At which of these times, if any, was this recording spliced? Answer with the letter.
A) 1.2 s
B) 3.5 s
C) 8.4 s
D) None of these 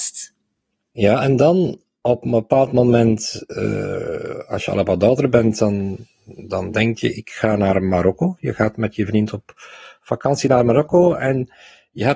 D